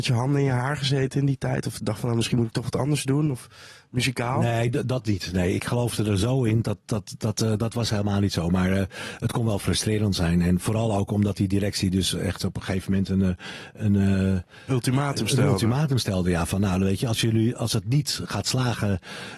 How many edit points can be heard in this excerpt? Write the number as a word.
zero